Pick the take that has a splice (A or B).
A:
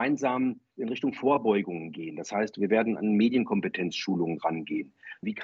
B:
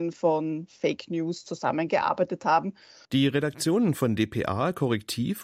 B